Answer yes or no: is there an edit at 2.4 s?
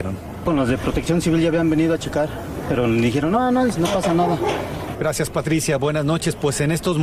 no